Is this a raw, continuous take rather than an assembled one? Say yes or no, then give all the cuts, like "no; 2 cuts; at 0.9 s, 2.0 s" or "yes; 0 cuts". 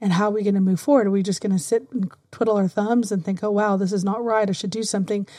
yes; 0 cuts